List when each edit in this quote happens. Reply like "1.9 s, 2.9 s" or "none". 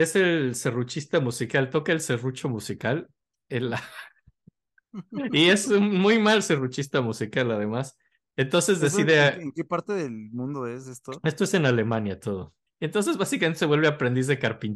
12.7 s